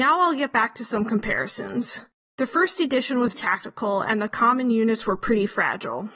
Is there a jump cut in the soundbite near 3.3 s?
yes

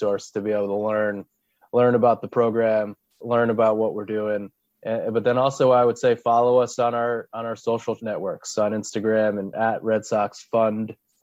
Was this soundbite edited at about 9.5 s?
yes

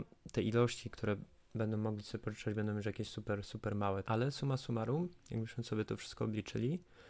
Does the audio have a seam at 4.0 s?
yes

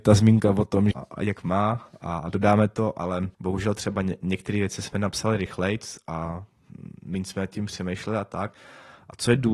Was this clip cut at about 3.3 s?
yes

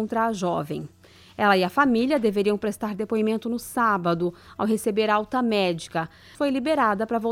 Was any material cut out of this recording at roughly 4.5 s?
no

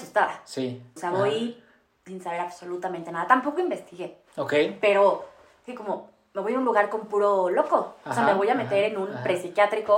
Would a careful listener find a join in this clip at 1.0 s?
yes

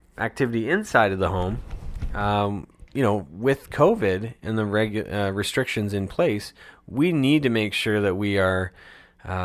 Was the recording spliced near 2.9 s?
no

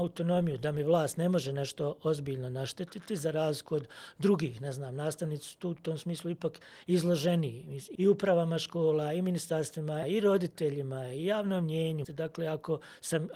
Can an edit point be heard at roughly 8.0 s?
yes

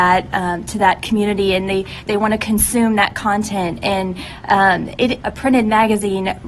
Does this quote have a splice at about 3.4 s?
no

